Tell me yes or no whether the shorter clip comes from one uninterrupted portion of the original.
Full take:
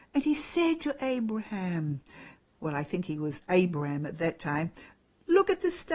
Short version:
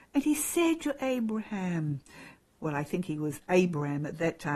yes